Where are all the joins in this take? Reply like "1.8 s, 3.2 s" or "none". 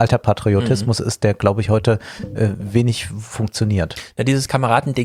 none